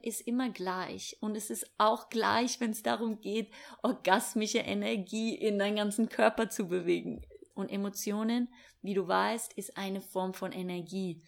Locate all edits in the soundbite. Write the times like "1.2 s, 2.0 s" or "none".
7.5 s